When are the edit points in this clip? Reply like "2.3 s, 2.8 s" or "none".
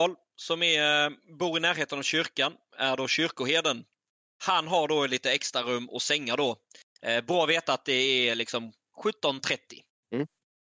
none